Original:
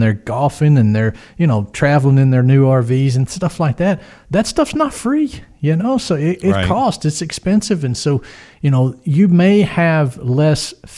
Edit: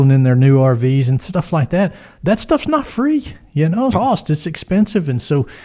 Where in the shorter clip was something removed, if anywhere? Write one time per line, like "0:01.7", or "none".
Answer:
0:03.9